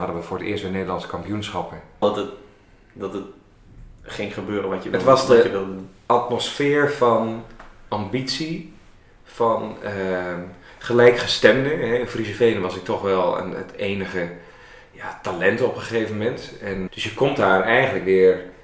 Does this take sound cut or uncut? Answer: cut